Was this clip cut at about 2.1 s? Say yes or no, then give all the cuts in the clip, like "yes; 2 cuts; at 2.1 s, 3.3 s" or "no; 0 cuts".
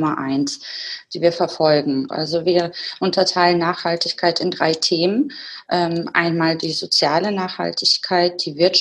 yes; 1 cut; at 2.1 s